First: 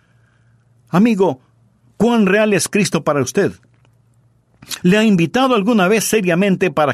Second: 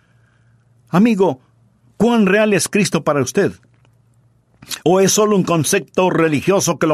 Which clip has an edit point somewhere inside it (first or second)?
first